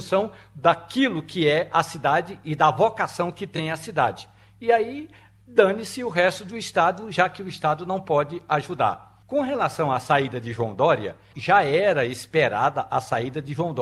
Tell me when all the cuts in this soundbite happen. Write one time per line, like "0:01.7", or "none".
0:09.2
0:11.3